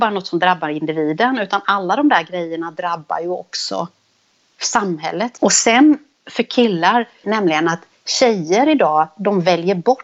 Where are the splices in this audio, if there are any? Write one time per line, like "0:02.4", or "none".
0:05.4
0:07.2